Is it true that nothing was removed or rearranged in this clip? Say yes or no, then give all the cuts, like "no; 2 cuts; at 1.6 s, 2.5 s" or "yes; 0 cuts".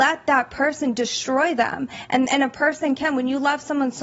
yes; 0 cuts